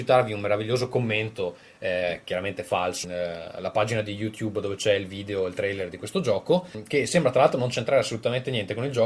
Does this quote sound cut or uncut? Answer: cut